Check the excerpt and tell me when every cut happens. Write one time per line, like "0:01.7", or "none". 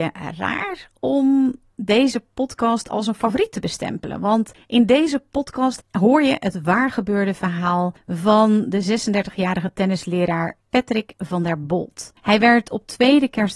0:05.8